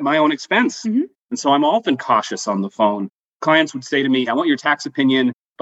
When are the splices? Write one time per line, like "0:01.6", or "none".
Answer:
0:01.2
0:04.3